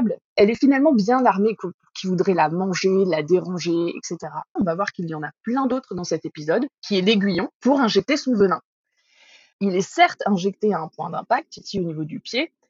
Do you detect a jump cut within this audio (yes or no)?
yes